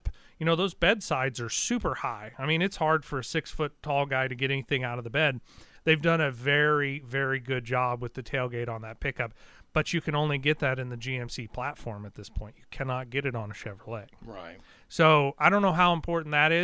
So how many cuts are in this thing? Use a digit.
1